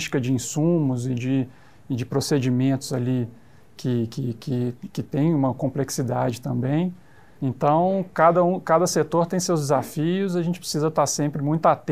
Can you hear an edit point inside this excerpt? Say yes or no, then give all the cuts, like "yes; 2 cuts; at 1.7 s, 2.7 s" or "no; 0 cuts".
no; 0 cuts